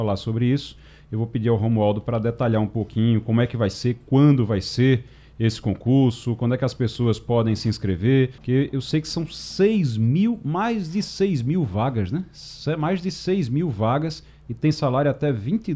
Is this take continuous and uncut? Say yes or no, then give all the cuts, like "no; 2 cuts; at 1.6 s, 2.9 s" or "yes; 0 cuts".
no; 1 cut; at 8.4 s